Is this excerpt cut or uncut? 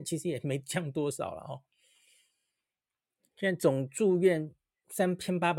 uncut